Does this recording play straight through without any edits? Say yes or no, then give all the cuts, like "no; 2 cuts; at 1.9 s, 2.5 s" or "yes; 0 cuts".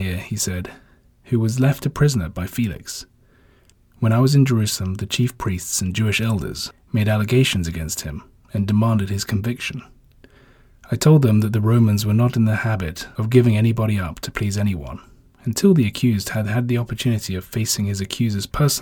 yes; 0 cuts